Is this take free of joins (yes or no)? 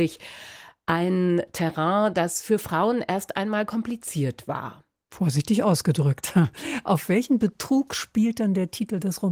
yes